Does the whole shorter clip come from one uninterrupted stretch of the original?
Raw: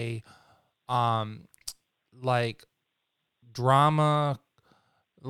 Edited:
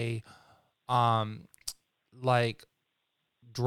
yes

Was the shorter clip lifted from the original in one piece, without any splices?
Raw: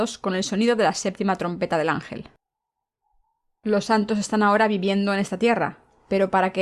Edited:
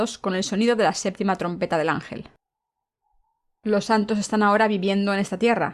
yes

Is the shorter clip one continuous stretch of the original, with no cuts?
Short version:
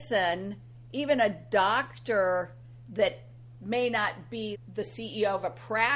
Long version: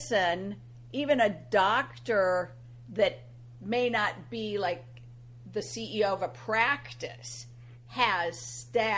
no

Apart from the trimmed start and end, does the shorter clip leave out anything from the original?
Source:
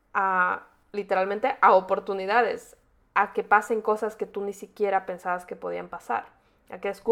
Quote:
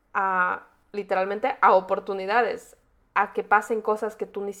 no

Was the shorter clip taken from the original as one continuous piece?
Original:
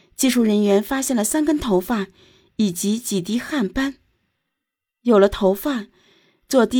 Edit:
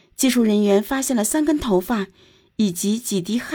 yes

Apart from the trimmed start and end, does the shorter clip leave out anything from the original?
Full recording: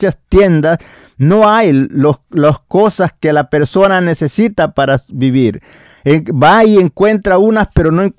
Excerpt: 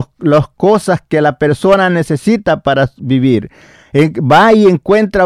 no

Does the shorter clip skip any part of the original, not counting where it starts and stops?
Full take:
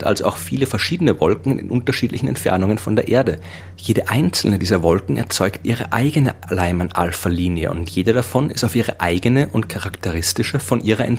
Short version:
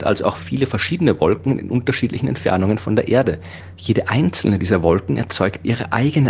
no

